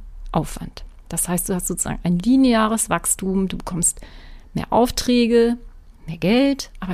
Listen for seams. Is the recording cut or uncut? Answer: uncut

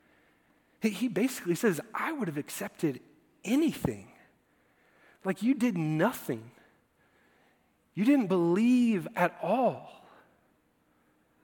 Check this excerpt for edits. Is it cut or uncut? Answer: uncut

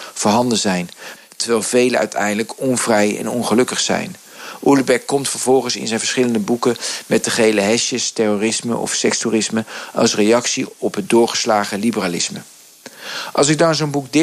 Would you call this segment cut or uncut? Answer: cut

